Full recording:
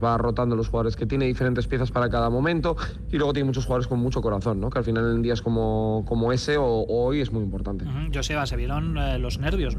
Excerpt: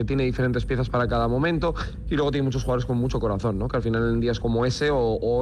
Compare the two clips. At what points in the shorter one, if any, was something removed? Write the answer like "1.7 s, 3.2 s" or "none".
4.4 s